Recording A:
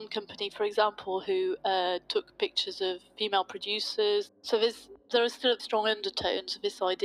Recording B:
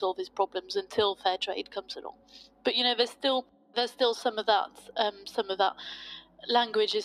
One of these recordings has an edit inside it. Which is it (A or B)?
A